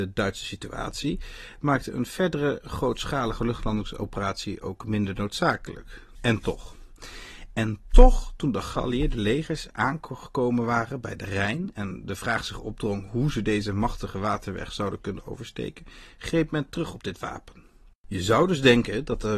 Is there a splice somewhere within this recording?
yes; 2 cuts; at 6.1 s, 17.9 s

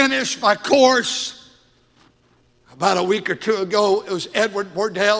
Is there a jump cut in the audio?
no; 0 cuts

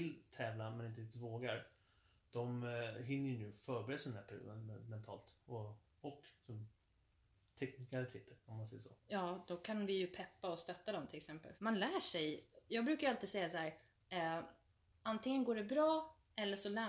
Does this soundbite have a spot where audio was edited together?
yes; 1 cut; at 11.6 s

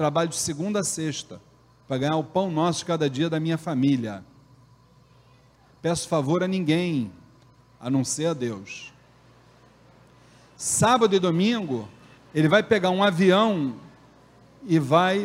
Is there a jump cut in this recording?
yes; 1 cut; at 12.2 s

